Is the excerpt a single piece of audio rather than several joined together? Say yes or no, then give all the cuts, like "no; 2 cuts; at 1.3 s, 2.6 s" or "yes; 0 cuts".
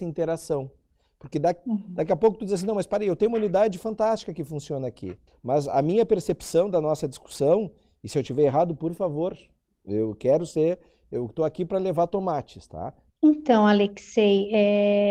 no; 2 cuts; at 5.3 s, 13.1 s